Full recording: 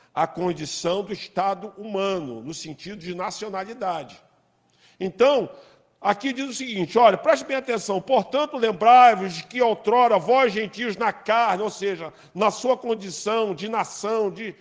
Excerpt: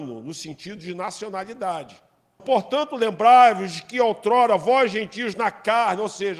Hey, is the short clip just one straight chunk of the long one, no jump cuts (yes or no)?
no